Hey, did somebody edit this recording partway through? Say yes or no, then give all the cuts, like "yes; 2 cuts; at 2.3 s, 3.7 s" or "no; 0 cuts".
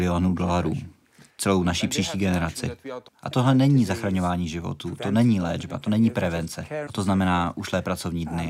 yes; 2 cuts; at 3.1 s, 6.9 s